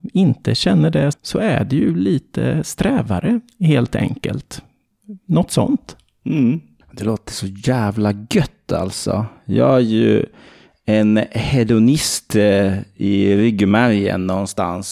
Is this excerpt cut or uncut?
cut